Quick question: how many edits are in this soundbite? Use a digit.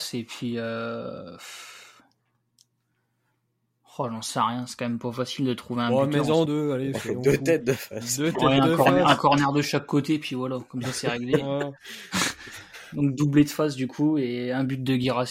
1